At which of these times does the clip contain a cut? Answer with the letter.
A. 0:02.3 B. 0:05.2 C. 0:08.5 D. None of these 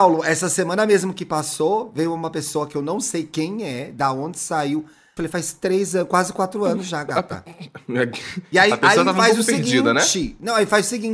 B